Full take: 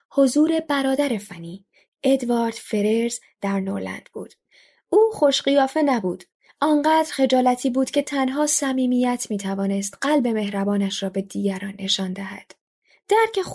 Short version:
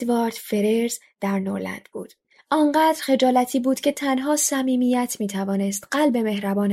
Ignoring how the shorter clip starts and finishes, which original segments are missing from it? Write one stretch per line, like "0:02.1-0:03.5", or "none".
0:04.5-0:06.4